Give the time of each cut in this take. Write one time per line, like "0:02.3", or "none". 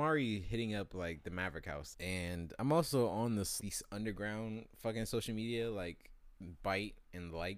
0:01.9
0:03.6